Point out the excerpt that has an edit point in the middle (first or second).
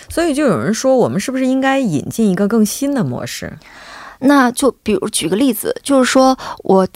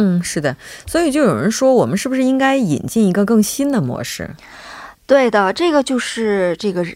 first